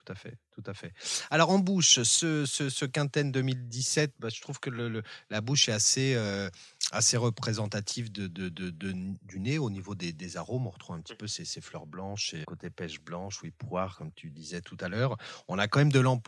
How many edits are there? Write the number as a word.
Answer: two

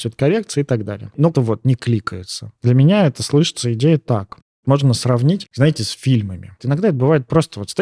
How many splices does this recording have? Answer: three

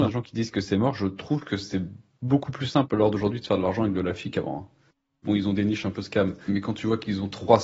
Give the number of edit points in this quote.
two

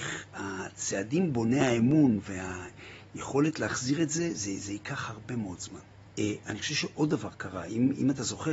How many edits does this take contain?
one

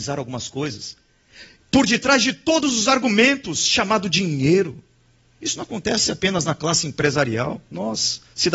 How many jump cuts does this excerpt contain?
one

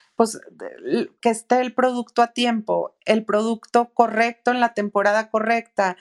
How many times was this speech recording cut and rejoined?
one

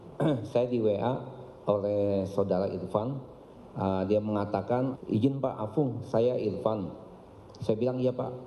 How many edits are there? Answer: one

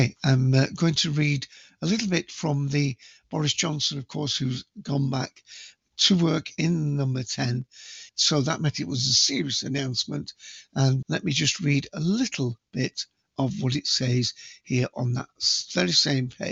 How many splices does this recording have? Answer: two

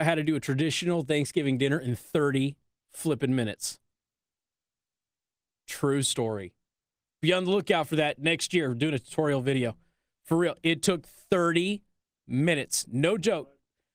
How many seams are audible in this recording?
zero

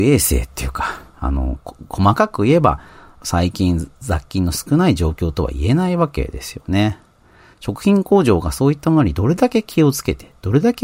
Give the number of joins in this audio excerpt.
zero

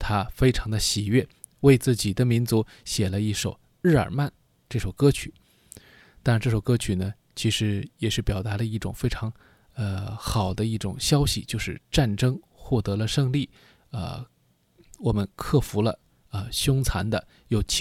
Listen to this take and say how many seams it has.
zero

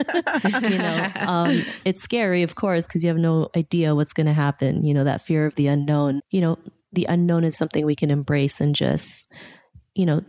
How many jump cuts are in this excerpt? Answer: two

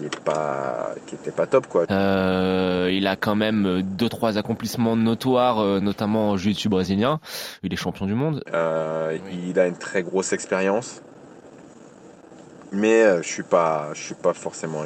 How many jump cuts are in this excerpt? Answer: two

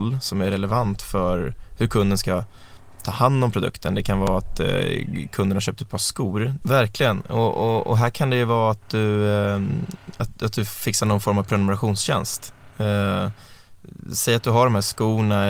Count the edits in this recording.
one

